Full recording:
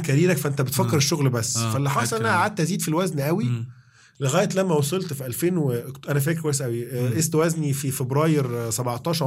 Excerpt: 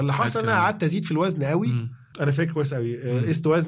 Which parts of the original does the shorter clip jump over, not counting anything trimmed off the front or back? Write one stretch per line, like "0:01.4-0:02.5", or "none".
0:03.9-0:06.0